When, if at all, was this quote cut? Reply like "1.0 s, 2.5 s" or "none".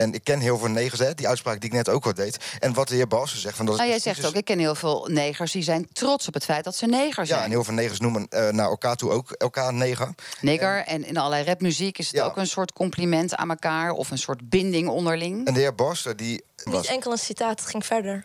16.7 s